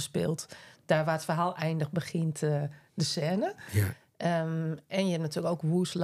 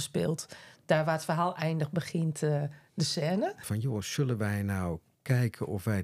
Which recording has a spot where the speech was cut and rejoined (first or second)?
second